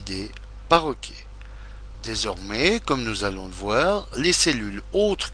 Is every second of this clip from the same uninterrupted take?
yes; 0 cuts

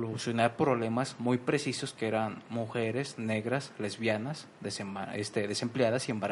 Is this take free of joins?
yes; 0 cuts

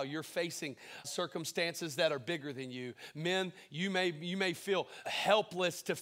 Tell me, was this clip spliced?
yes; 2 cuts; at 1.0 s, 5.0 s

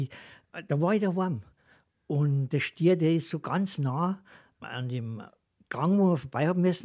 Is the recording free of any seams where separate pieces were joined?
yes; 0 cuts

